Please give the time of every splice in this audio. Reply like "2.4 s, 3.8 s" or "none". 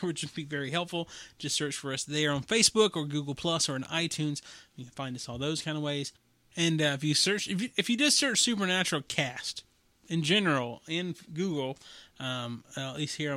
none